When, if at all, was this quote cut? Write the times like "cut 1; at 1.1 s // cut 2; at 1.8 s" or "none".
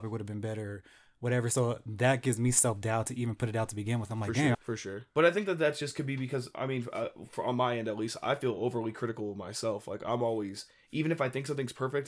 cut 1; at 4.5 s